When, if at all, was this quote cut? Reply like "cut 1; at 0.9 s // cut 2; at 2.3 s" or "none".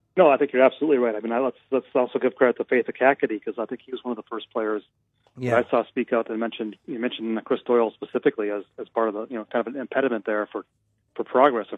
none